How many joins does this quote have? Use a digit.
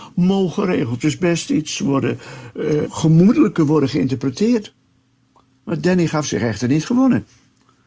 1